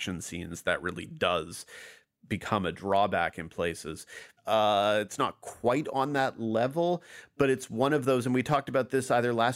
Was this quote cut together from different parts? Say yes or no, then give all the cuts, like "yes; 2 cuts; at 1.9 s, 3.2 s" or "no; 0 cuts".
yes; 1 cut; at 4.4 s